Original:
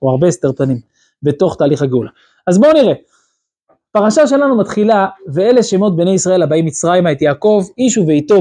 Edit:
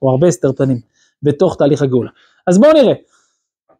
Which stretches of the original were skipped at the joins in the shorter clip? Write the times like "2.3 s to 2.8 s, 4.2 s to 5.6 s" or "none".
none